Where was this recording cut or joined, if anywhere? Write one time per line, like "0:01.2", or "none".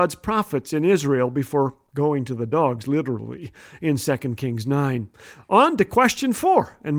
none